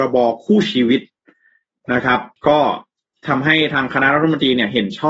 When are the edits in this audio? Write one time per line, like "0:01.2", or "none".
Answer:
0:02.4